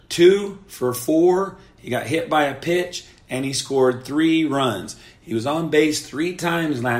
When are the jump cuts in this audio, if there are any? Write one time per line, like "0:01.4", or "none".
none